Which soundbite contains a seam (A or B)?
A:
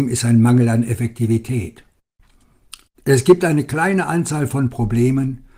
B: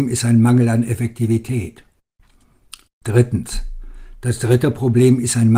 A